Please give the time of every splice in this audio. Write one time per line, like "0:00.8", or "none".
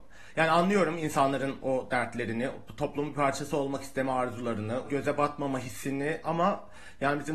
0:04.8